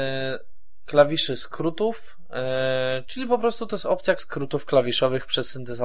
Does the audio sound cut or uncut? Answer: cut